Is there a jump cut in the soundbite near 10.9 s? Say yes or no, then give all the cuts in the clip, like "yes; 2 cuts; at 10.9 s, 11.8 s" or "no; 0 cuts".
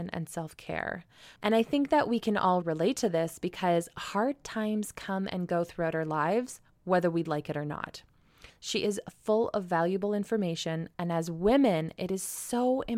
no; 3 cuts; at 1.4 s, 2.6 s, 8.5 s